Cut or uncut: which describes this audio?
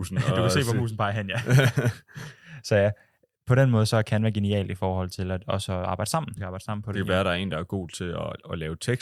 cut